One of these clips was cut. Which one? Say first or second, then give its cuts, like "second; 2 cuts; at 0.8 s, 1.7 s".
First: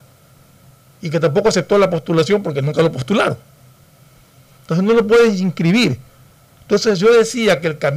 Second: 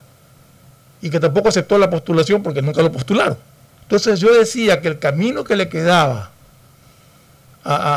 second; 1 cut; at 3.7 s